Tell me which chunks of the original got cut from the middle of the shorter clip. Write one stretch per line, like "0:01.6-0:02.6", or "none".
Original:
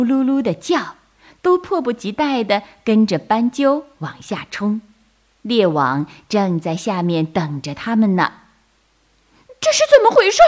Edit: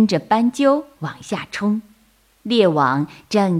none